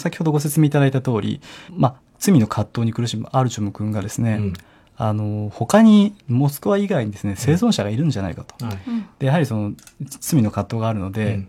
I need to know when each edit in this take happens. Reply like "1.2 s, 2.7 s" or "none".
1.7 s